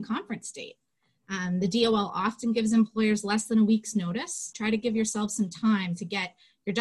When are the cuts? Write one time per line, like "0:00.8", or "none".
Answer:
0:04.5